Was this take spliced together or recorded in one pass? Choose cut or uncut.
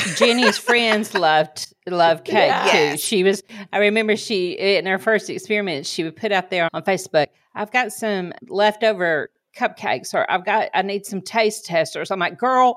cut